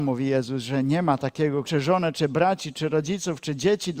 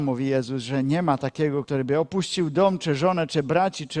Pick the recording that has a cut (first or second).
first